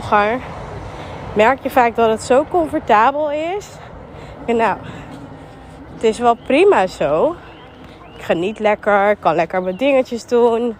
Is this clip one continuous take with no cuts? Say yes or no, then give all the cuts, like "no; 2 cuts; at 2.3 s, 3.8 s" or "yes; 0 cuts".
no; 1 cut; at 4.5 s